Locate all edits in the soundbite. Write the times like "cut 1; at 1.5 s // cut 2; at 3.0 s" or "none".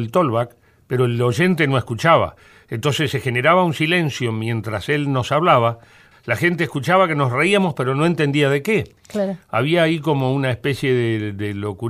cut 1; at 6.1 s